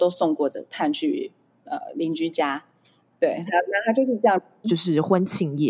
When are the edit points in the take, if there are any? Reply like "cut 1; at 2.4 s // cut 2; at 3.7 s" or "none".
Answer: cut 1; at 4.6 s